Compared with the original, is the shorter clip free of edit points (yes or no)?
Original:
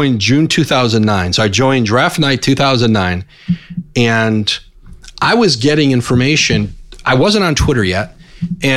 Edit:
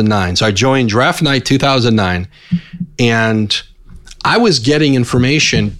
yes